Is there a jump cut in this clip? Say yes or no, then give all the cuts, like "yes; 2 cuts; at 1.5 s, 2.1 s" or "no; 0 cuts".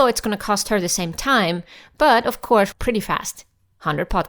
yes; 1 cut; at 2.7 s